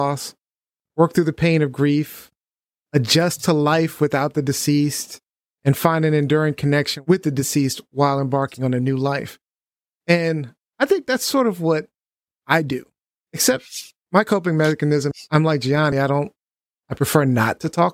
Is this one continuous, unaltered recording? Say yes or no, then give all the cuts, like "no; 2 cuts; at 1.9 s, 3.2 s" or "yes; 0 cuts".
yes; 0 cuts